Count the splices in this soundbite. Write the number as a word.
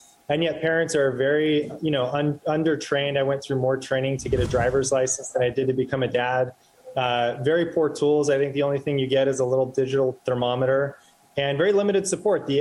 zero